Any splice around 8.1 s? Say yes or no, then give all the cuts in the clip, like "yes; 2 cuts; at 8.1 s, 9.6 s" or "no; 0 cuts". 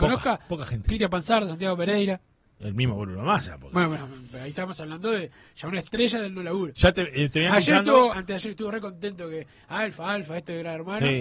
yes; 1 cut; at 8.1 s